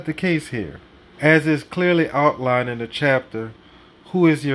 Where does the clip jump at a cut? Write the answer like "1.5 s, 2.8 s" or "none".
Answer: 1.1 s